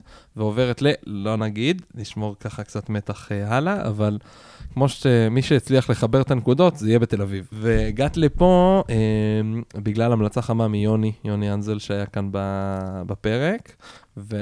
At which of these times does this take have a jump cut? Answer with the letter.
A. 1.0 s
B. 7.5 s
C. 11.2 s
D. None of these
B